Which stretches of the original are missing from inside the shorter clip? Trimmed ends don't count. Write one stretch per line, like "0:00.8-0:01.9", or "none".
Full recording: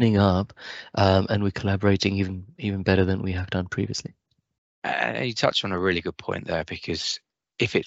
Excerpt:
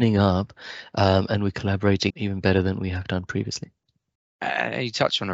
0:02.1-0:02.5